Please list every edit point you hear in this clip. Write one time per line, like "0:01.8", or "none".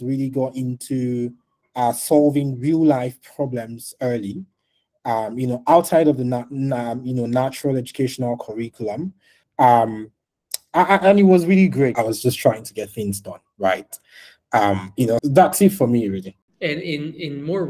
0:11.9
0:15.2